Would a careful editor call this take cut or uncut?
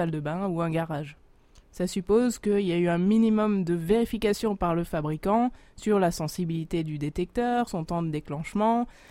cut